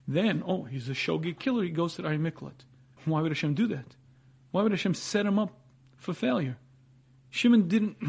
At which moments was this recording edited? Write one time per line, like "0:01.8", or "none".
0:03.0